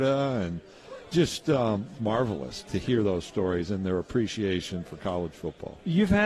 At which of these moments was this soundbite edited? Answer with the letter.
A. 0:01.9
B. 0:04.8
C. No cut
A